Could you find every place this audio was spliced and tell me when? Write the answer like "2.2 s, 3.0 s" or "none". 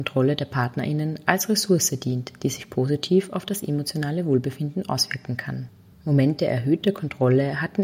5.9 s